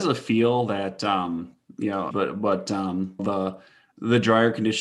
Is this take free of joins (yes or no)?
no